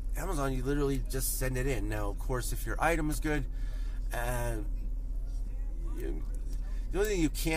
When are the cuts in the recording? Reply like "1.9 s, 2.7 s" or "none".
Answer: none